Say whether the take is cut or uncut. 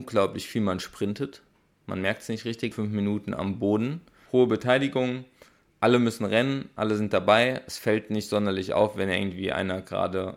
cut